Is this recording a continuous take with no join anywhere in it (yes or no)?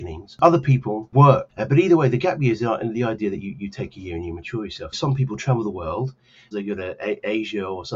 no